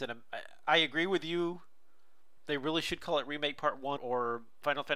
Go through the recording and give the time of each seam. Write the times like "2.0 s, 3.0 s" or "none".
4.0 s